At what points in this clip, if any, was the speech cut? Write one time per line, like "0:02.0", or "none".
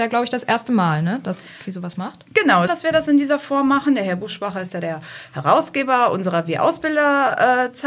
0:02.7